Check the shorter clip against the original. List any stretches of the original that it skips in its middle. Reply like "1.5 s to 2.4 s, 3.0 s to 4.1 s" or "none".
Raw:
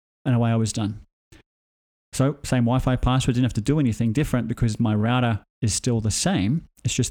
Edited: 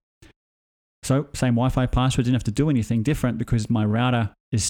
none